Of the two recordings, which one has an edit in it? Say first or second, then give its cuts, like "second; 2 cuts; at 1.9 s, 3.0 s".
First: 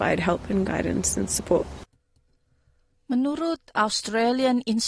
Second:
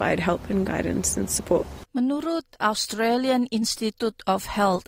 second; 1 cut; at 1.9 s